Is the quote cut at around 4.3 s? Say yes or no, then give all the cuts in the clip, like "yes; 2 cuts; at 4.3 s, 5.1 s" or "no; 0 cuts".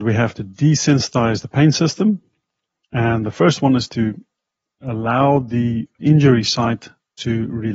no; 2 cuts; at 2.8 s, 6.0 s